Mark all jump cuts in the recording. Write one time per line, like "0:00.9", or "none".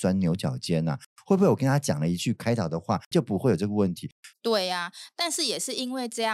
0:03.1
0:04.3